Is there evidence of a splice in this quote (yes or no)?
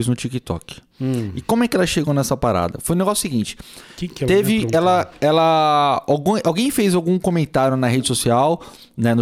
no